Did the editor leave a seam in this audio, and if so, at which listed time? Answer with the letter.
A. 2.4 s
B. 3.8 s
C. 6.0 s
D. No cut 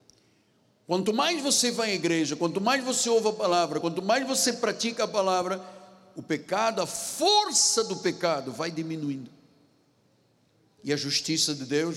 D